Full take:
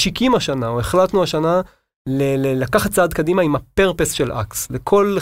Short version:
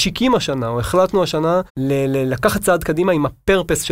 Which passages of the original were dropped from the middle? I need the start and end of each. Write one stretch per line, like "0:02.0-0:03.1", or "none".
0:01.7-0:02.0